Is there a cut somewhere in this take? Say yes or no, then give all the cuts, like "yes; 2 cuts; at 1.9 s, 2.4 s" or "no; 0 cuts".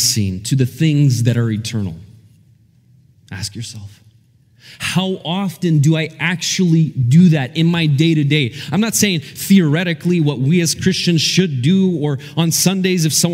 no; 0 cuts